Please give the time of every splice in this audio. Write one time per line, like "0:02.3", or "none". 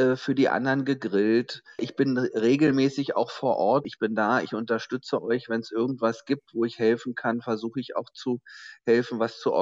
0:03.8